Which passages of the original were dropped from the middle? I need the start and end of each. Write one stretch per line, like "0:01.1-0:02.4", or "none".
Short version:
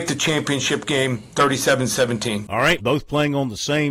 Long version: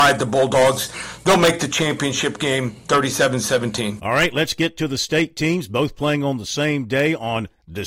0:04.3-0:05.7